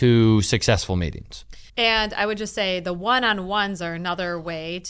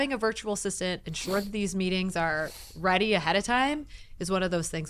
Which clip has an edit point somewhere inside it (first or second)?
first